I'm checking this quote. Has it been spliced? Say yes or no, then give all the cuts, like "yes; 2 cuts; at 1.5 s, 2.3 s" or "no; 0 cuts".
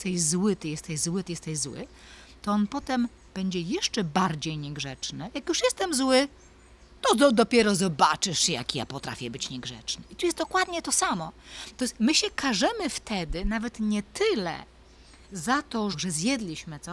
yes; 2 cuts; at 11.7 s, 15.9 s